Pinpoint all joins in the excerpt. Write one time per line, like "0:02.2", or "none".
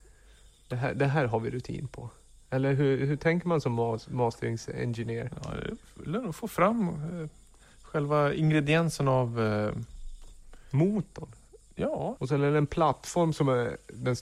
0:12.2